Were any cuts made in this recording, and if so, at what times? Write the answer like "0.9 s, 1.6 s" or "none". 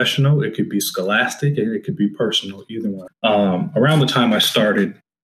3.1 s

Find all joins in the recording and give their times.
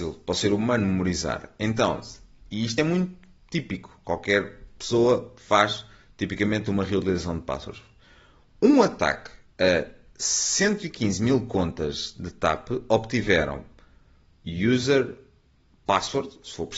none

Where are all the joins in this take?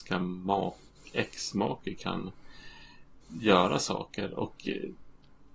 3.2 s

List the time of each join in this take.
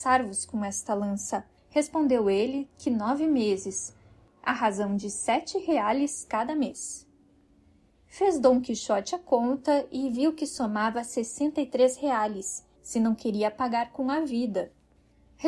1.6 s, 12.8 s

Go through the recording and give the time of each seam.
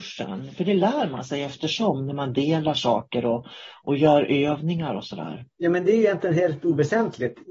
none

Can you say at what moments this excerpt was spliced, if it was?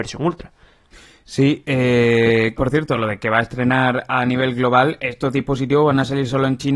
2.6 s

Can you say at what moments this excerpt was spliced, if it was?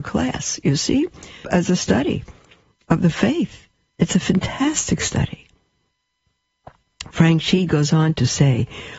1.4 s

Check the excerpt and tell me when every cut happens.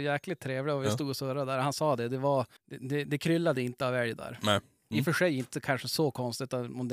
2.6 s, 4.9 s

